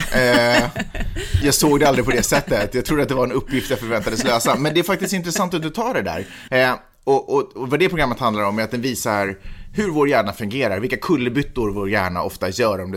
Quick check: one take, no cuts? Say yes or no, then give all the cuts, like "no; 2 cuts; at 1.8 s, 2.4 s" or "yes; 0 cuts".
no; 2 cuts; at 1.4 s, 6.5 s